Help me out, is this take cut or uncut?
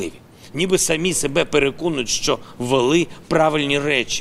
uncut